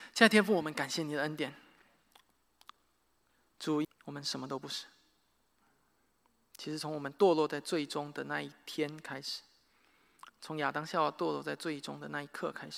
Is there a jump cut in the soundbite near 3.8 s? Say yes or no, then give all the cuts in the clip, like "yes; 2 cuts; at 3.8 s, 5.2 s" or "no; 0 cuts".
yes; 1 cut; at 3.8 s